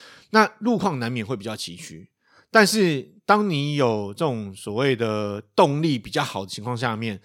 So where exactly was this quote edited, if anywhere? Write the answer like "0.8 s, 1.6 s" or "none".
none